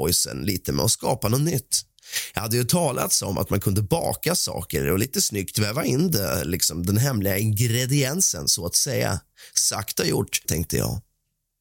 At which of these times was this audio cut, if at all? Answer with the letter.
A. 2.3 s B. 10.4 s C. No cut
B